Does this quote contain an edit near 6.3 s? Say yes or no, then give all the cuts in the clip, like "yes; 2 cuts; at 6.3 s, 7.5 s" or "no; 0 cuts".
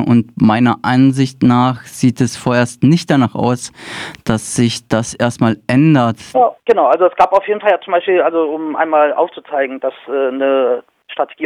yes; 1 cut; at 6.3 s